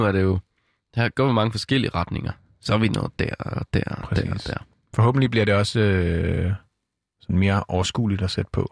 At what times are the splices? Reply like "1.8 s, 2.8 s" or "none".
none